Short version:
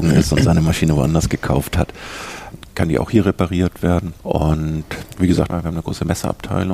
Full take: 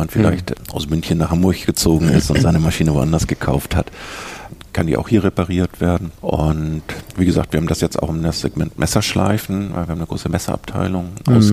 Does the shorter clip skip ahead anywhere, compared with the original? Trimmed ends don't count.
yes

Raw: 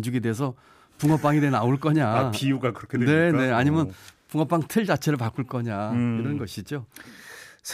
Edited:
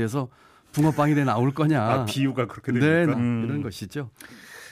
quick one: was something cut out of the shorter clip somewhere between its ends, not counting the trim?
yes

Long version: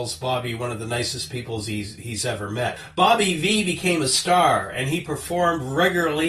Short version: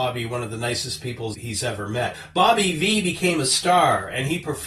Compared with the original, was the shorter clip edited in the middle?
yes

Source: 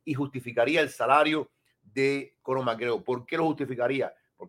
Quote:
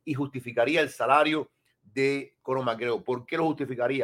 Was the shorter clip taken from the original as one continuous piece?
yes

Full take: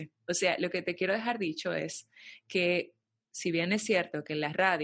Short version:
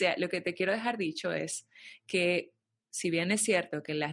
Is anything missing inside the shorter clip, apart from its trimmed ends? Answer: no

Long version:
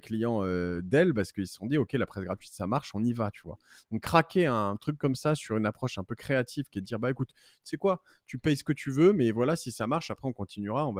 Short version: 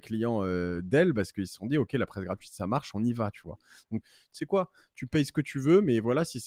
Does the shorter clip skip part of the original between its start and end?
yes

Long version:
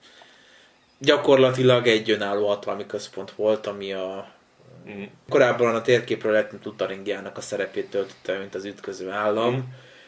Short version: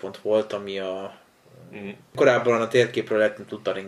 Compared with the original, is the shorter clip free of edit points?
yes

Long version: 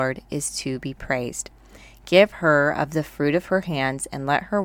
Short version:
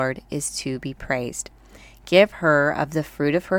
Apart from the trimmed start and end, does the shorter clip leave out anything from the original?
no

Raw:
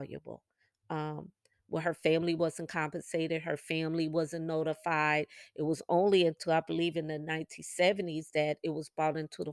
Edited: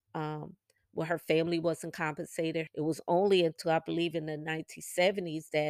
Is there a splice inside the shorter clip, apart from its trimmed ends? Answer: yes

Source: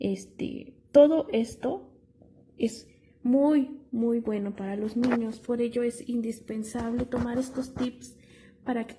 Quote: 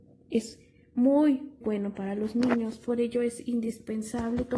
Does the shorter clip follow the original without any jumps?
no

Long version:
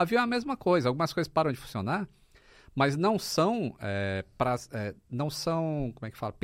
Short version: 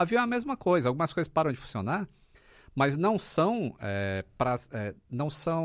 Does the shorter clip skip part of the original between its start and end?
no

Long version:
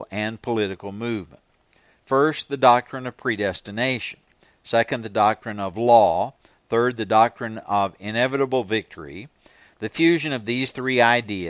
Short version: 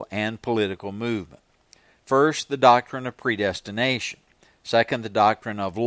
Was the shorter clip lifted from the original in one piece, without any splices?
yes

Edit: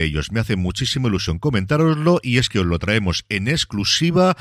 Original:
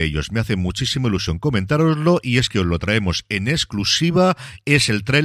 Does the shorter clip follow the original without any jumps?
yes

